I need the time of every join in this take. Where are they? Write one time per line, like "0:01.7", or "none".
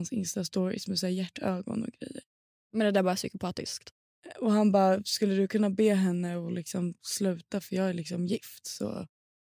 none